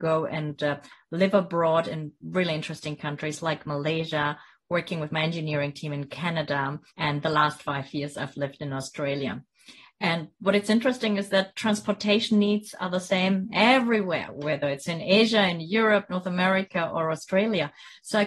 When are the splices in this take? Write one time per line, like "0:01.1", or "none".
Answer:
0:06.9